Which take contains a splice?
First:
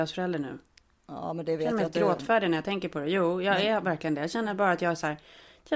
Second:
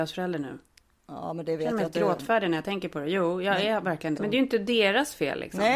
second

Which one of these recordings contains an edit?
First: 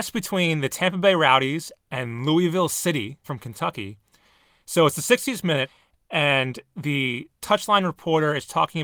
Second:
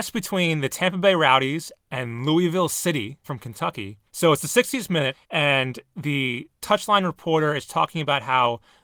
second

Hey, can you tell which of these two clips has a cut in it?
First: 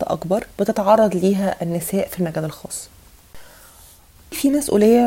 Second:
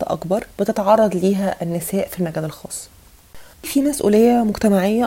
second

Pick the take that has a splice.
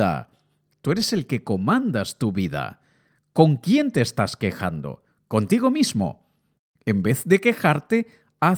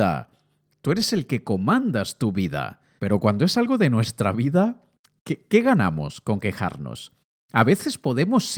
second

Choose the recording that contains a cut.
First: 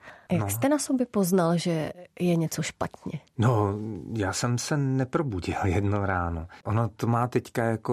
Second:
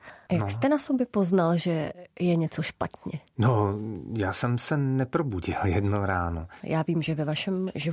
second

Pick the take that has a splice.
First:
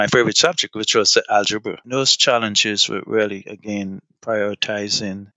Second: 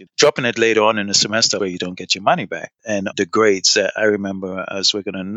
second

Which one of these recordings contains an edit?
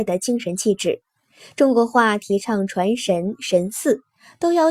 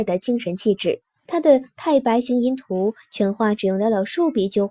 second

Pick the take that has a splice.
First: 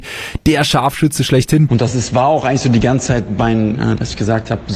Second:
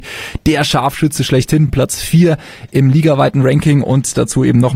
first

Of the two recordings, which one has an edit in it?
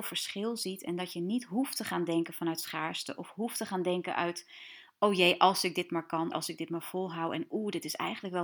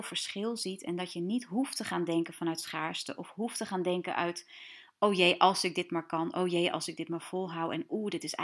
first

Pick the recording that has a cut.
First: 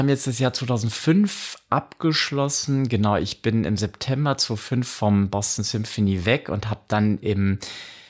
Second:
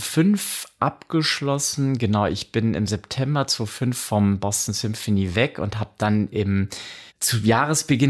second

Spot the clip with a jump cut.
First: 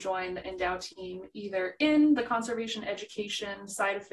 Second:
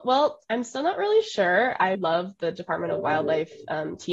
second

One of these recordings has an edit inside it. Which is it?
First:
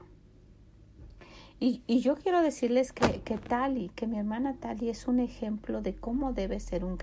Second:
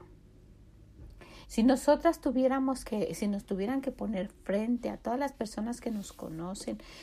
second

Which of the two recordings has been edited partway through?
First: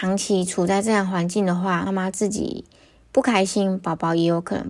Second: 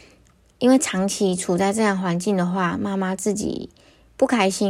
first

